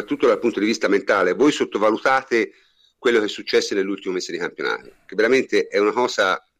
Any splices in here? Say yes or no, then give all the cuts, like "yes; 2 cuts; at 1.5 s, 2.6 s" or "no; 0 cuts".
no; 0 cuts